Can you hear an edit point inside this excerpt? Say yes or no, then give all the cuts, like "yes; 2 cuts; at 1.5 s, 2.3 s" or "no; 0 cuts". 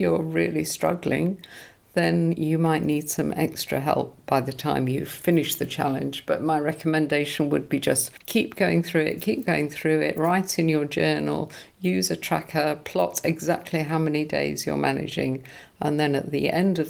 no; 0 cuts